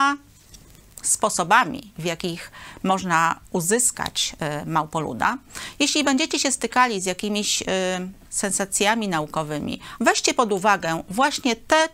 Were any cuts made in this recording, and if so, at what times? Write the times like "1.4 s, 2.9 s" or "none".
10.0 s